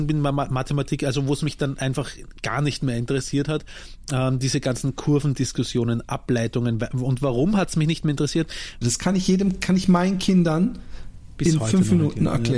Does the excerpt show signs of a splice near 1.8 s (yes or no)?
no